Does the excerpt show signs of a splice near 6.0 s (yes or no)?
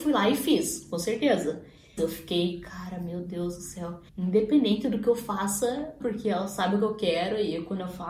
yes